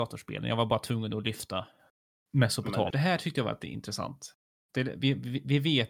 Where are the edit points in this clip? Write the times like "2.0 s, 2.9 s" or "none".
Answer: 2.9 s